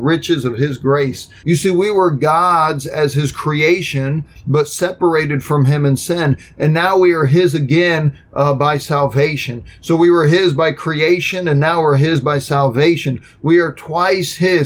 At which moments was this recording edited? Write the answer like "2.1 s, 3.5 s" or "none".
1.4 s